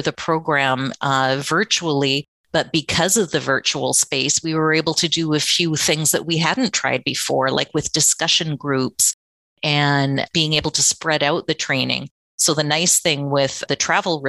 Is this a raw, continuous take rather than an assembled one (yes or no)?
yes